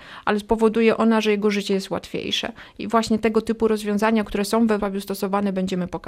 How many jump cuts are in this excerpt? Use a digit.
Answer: 1